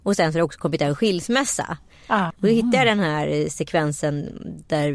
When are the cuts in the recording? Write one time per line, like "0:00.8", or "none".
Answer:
0:02.3